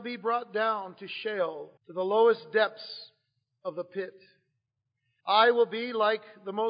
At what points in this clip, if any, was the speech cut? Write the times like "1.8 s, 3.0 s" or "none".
1.8 s, 5.2 s